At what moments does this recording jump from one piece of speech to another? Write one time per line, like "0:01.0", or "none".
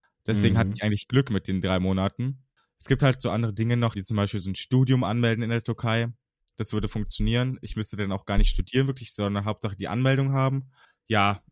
0:03.9